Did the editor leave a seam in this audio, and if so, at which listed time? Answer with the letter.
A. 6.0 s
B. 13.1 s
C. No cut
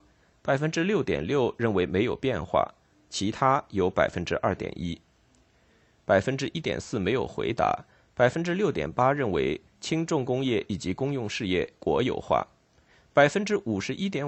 A